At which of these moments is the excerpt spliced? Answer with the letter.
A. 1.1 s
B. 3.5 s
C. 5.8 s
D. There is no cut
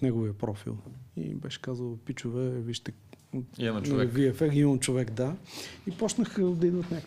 B